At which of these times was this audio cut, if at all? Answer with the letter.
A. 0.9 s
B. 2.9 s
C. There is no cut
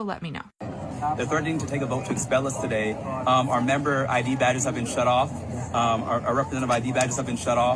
A